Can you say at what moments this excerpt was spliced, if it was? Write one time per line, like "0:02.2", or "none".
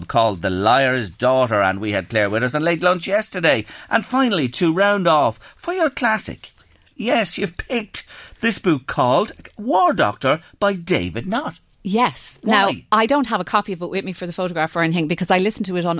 none